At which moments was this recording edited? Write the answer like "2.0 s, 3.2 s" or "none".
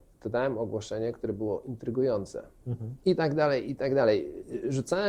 3.0 s